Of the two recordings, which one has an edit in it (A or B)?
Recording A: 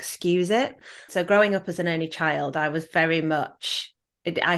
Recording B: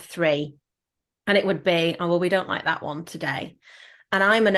A